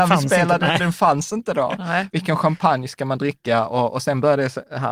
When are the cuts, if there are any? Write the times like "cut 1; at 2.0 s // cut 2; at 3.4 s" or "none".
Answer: none